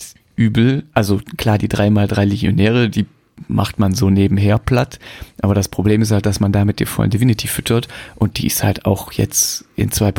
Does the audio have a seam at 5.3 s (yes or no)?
no